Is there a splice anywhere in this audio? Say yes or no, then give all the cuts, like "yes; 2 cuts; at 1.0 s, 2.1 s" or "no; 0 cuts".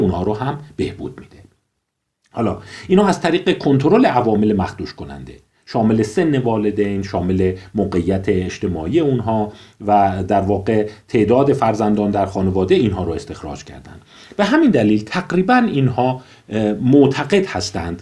no; 0 cuts